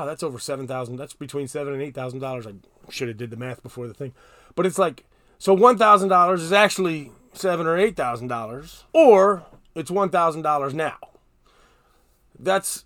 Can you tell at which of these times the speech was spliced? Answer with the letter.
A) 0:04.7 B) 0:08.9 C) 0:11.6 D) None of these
B